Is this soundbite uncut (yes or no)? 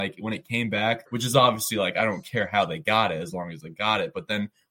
no